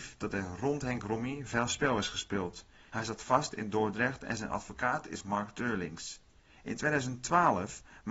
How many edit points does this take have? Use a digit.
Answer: 1